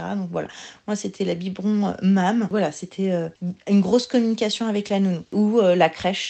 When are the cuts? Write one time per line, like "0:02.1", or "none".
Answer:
none